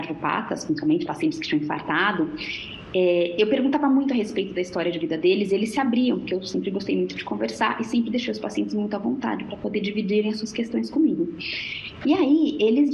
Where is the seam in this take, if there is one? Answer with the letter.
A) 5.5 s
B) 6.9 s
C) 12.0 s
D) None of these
D